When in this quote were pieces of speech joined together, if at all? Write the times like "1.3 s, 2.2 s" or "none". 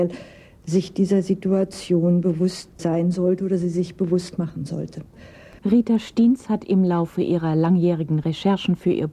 5.6 s